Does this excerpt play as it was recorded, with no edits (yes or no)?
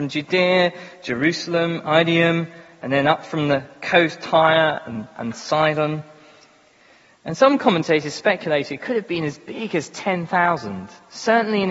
yes